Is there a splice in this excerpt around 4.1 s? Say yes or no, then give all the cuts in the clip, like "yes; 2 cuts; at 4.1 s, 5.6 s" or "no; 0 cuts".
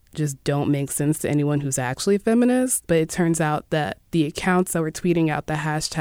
yes; 2 cuts; at 2.9 s, 4.1 s